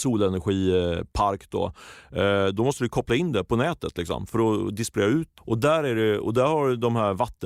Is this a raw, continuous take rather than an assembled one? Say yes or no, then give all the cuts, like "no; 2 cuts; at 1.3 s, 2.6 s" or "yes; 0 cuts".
no; 1 cut; at 5.4 s